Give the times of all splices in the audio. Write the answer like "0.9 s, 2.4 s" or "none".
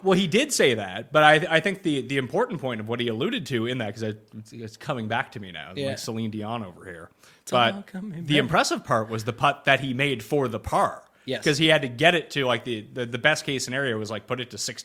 none